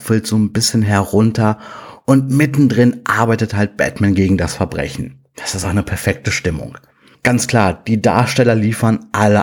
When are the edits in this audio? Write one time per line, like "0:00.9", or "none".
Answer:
0:05.6